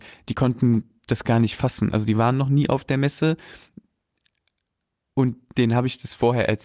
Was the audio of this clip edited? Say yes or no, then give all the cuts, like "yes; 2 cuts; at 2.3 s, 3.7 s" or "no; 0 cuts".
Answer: no; 0 cuts